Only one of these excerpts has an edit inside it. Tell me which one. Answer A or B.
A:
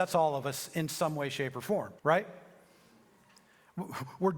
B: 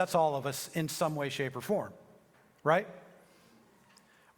A